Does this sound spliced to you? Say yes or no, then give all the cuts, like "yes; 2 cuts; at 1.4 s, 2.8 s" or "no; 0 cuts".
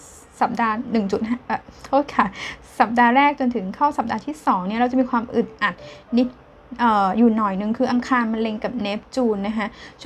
no; 0 cuts